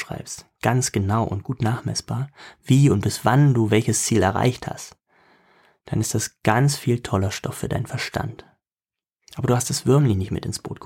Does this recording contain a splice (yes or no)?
no